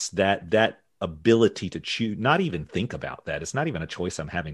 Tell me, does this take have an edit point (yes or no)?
no